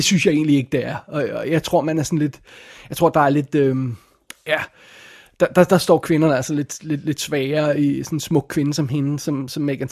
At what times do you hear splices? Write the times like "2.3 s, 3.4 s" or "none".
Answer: none